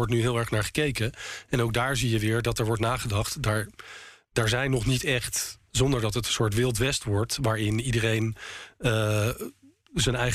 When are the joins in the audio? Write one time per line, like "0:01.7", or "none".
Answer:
0:05.7

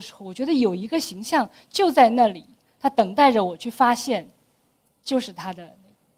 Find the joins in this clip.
none

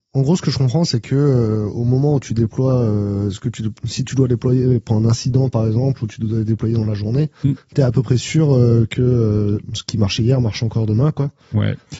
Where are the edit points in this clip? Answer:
none

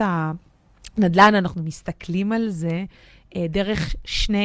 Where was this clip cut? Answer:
none

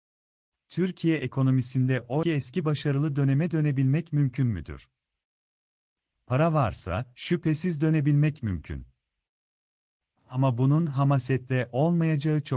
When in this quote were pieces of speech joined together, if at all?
0:02.2

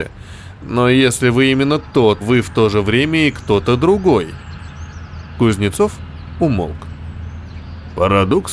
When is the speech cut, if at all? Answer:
0:02.2

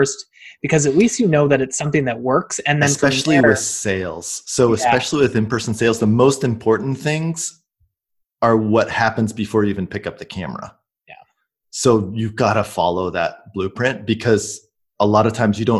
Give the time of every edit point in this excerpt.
none

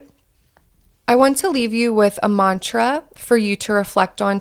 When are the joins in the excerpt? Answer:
0:01.0

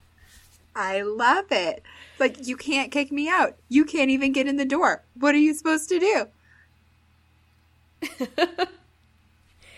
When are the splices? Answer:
none

